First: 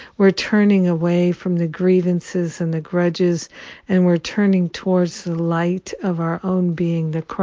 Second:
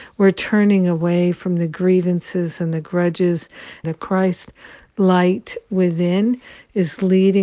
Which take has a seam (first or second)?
second